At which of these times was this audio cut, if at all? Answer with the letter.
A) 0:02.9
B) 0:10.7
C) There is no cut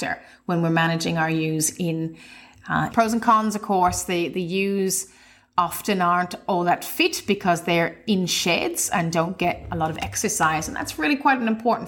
A